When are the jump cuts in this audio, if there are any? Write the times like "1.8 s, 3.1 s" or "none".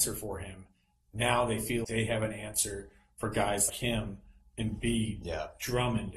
1.8 s, 3.7 s